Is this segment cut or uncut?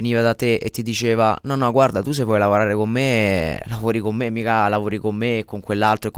uncut